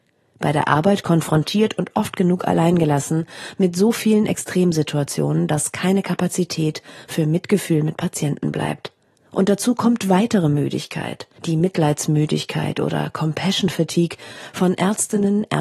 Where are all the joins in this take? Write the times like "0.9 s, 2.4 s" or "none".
9.1 s, 11.3 s